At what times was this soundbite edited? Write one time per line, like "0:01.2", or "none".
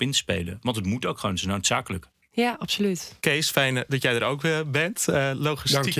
0:03.2